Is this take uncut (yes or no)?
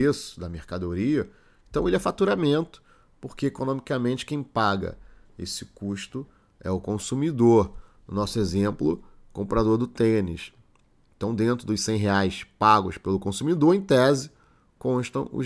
yes